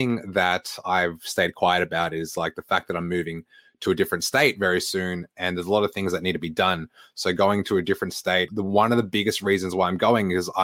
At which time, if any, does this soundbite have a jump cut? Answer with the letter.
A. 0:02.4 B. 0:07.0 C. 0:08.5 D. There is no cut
C